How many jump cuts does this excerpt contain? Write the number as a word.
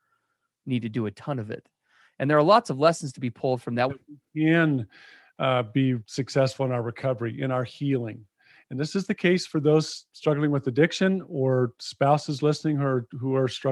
one